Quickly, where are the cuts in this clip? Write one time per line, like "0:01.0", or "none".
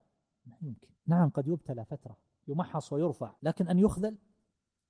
0:01.0
0:03.4